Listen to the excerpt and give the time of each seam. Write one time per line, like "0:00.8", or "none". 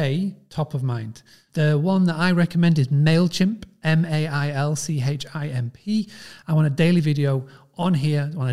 0:01.5
0:06.4

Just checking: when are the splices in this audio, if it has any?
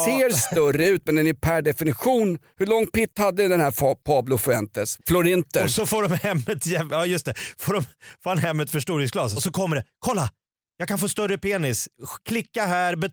0:05.0
0:09.4

